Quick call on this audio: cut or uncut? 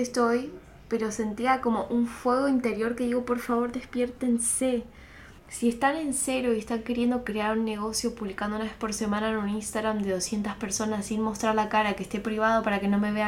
cut